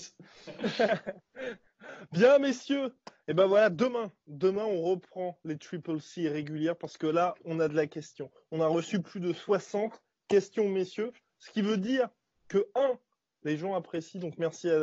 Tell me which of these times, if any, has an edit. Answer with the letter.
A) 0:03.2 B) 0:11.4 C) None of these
C